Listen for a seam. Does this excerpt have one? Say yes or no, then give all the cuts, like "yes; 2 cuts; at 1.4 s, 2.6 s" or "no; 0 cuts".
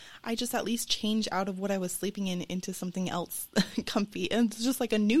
no; 0 cuts